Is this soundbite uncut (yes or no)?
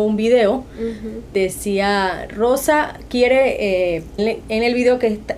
no